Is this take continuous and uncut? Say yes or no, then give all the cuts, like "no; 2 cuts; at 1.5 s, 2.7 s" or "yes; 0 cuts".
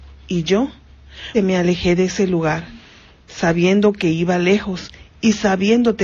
no; 1 cut; at 1.3 s